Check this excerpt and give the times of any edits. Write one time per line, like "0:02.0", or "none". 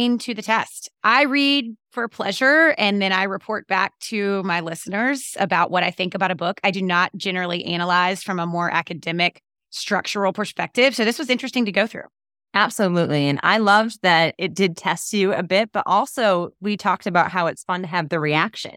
0:06.7